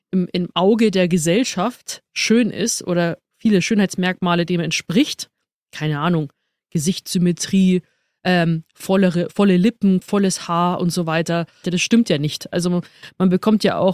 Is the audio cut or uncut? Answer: cut